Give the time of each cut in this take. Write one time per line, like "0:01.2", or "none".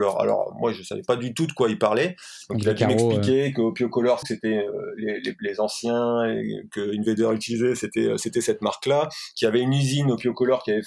0:04.2